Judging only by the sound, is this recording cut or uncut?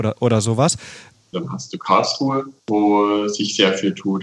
cut